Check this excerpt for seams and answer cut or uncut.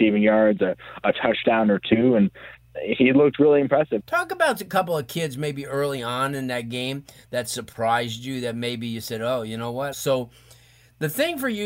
cut